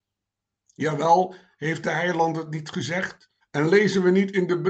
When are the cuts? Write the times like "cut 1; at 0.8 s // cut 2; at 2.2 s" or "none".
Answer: cut 1; at 3.4 s